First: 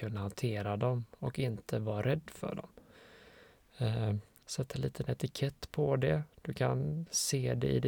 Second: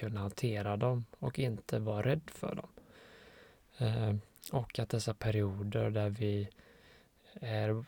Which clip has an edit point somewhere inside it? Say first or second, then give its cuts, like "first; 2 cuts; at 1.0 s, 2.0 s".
first; 1 cut; at 4.4 s